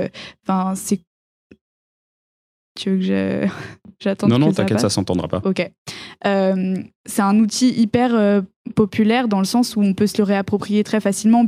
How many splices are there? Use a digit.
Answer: 0